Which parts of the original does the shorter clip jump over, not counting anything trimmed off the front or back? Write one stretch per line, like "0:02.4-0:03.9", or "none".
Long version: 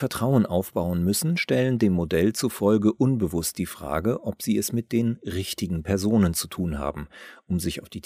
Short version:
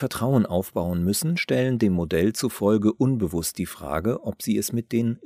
none